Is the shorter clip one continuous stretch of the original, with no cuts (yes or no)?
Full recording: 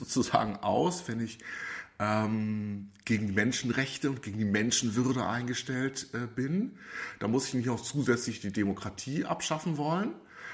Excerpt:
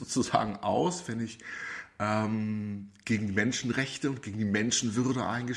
yes